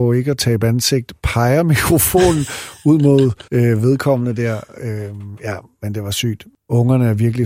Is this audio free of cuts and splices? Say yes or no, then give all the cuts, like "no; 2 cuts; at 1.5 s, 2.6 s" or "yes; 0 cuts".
no; 1 cut; at 3.5 s